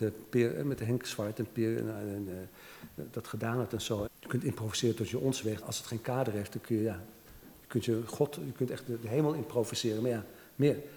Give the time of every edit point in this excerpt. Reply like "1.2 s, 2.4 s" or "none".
4.1 s, 5.6 s